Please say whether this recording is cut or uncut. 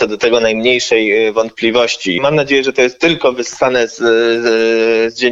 cut